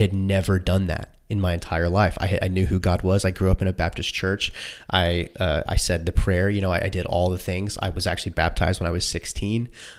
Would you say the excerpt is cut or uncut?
uncut